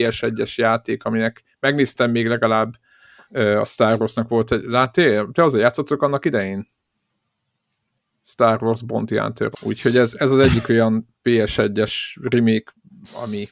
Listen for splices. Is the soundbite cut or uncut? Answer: cut